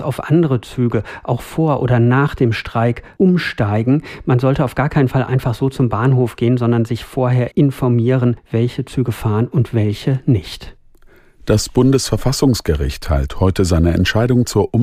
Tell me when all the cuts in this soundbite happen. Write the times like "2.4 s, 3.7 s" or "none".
7.5 s